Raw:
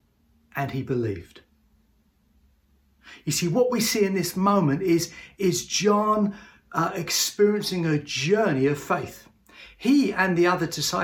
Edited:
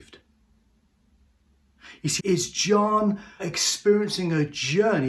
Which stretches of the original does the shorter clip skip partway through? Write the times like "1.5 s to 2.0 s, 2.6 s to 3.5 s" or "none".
3.4 s to 5.3 s, 6.5 s to 6.9 s